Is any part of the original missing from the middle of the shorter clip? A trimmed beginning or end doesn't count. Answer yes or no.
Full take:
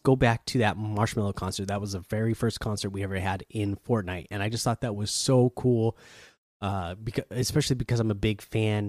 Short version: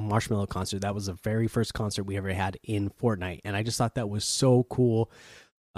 no